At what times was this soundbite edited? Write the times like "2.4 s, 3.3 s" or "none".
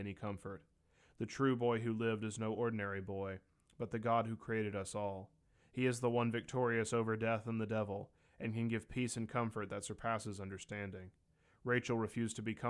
none